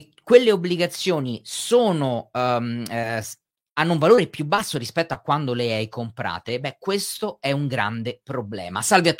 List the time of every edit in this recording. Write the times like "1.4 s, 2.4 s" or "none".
none